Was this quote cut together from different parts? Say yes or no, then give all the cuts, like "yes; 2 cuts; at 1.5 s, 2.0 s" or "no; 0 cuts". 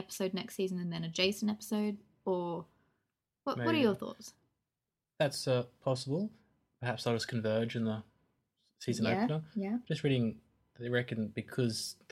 no; 0 cuts